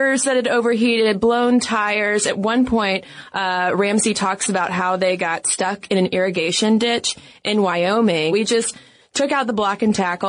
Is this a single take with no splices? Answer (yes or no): no